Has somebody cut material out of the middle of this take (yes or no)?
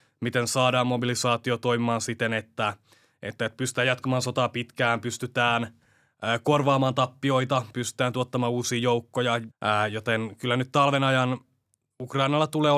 yes